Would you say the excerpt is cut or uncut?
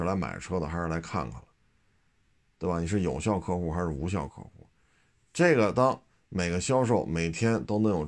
uncut